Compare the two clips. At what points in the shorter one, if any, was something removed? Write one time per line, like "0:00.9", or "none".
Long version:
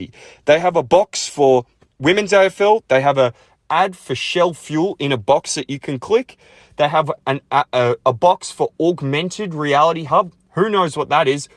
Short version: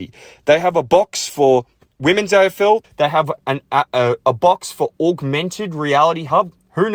0:02.8